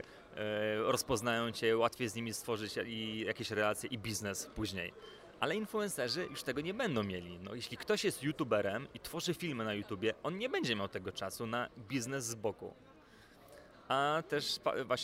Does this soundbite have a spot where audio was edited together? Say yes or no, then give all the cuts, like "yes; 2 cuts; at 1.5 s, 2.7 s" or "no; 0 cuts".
no; 0 cuts